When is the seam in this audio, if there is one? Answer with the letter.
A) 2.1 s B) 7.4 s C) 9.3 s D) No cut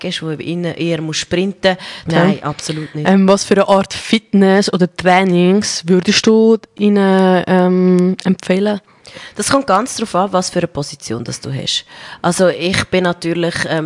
A